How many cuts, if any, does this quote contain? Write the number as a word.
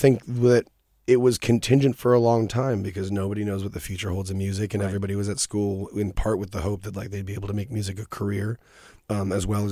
zero